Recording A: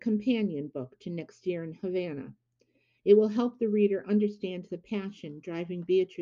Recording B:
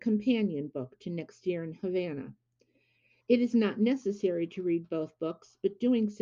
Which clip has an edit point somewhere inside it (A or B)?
A